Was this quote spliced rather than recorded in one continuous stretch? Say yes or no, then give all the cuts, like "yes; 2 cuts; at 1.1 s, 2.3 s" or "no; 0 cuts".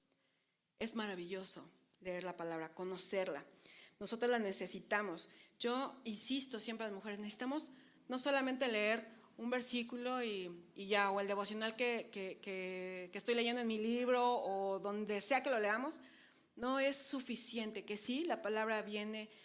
no; 0 cuts